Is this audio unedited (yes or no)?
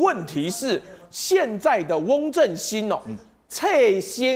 yes